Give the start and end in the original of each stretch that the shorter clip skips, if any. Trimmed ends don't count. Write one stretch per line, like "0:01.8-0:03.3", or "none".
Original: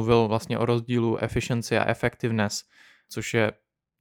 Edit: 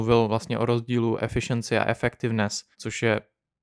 0:02.7-0:03.0